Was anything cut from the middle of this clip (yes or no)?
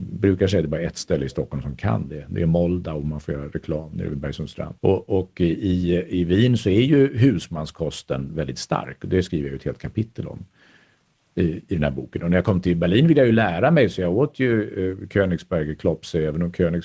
yes